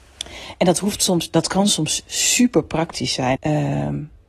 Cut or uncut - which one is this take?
cut